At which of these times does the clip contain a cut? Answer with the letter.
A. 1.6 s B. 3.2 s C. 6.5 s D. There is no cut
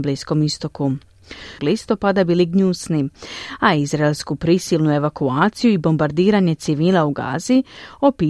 A